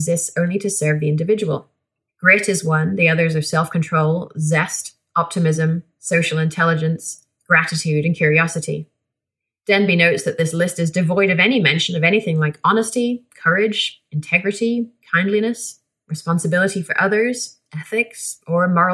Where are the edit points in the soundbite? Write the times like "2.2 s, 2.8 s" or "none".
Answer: 2.1 s